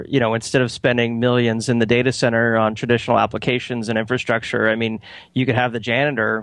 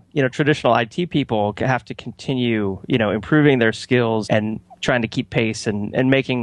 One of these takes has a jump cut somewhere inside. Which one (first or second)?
second